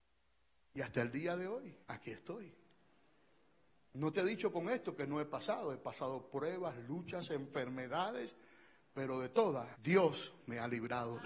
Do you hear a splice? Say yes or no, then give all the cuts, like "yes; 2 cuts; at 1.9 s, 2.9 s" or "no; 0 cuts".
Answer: yes; 2 cuts; at 1.8 s, 9.7 s